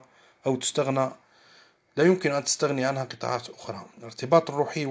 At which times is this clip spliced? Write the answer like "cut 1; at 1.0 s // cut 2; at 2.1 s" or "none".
cut 1; at 3.9 s